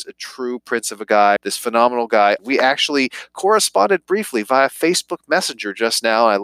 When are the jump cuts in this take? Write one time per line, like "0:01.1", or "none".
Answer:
0:01.4
0:02.4